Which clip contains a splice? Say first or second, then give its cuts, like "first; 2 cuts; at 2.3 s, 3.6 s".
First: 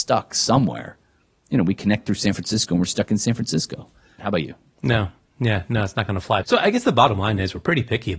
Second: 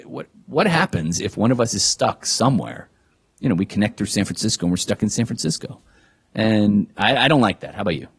first; 2 cuts; at 4.2 s, 6.4 s